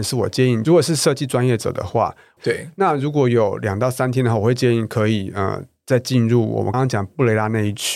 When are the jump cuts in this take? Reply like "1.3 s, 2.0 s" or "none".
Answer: 2.4 s, 6.7 s

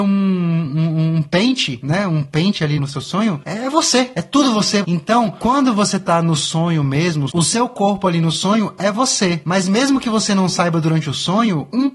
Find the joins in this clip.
2.8 s, 4.8 s, 7.3 s

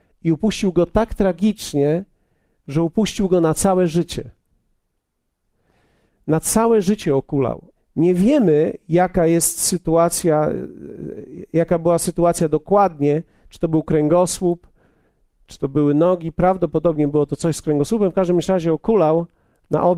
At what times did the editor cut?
7.7 s

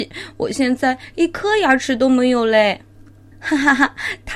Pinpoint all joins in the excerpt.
3.3 s

